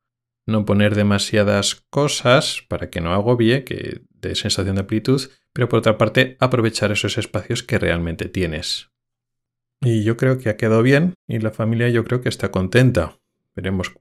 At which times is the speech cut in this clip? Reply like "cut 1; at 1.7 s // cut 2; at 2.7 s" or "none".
none

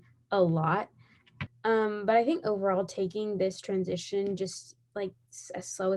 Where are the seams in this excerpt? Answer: cut 1; at 1.5 s

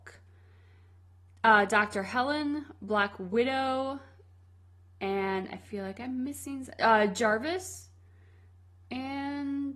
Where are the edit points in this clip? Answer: none

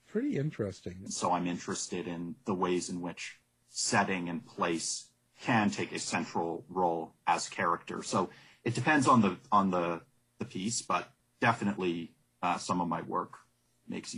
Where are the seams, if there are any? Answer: cut 1; at 1.1 s

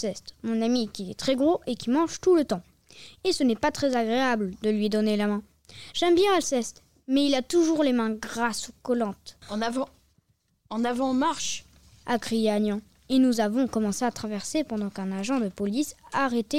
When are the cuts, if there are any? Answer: cut 1; at 9.4 s

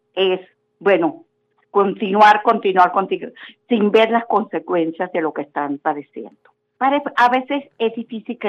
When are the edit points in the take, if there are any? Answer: cut 1; at 6.8 s

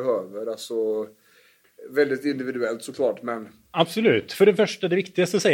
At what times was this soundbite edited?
none

